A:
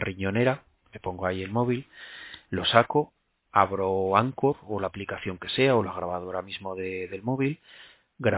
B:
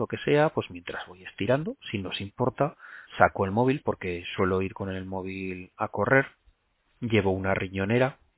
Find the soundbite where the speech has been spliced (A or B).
B